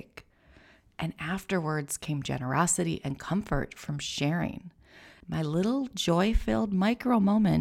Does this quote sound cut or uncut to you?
uncut